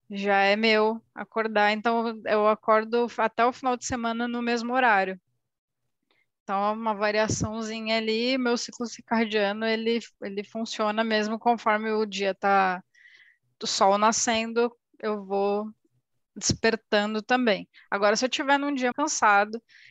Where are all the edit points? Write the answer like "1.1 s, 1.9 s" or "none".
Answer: 18.9 s